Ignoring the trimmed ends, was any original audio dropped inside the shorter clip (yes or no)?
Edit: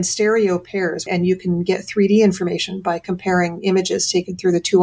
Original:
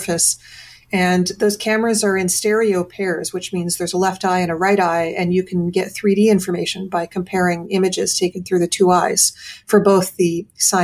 yes